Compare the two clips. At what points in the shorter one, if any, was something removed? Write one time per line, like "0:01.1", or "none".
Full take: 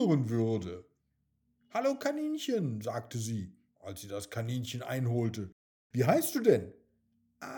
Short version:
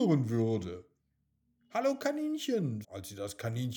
0:02.8